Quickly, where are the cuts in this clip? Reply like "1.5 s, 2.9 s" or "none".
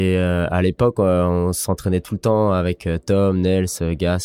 none